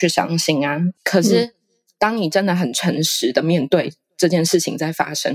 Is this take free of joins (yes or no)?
no